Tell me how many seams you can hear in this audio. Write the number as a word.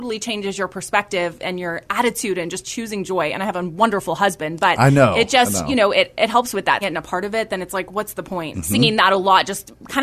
two